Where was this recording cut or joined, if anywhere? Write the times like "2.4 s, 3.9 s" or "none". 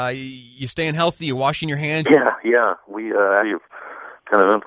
2.0 s, 3.4 s